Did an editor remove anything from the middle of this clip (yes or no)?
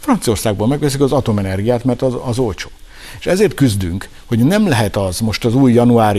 no